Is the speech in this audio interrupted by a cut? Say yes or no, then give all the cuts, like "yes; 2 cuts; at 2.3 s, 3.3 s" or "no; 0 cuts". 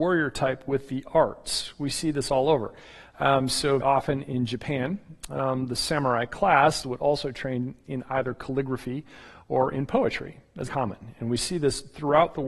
yes; 3 cuts; at 3.8 s, 6.8 s, 10.7 s